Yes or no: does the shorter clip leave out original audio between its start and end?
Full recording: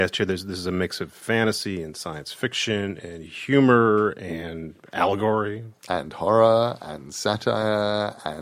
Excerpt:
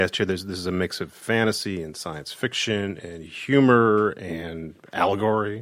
no